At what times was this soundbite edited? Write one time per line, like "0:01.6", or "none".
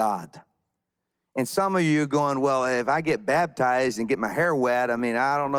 none